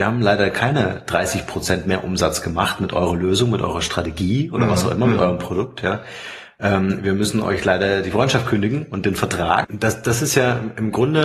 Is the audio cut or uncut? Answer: cut